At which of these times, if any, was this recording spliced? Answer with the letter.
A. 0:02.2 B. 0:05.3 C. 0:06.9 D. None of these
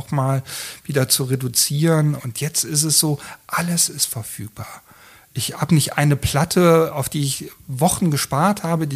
A